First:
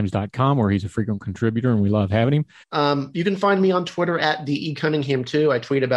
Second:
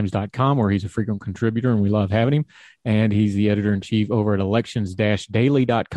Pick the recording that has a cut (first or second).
first